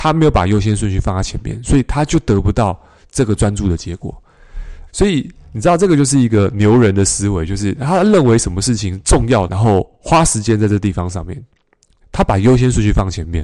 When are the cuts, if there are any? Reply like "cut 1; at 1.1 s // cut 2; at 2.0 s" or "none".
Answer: cut 1; at 4.9 s // cut 2; at 9.5 s // cut 3; at 12.0 s